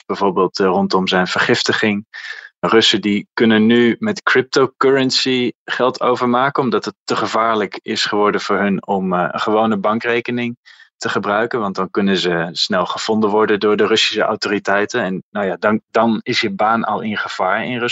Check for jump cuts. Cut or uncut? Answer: uncut